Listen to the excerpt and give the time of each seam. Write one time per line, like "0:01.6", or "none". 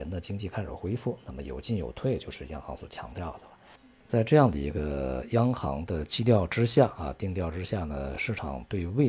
none